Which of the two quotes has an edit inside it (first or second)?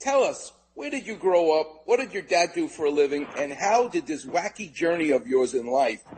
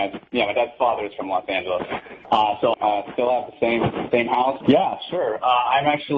second